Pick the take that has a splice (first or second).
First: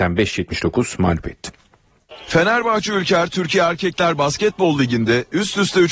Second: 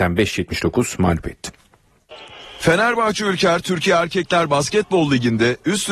first